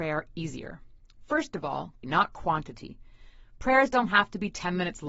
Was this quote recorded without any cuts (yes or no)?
no